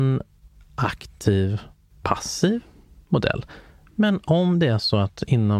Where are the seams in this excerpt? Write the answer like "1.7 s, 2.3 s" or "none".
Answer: none